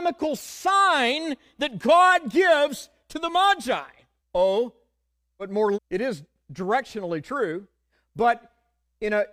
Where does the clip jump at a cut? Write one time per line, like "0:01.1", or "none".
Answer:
0:04.2
0:05.7